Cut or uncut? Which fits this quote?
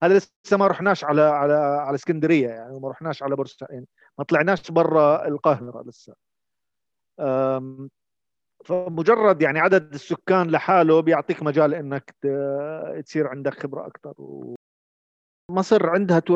uncut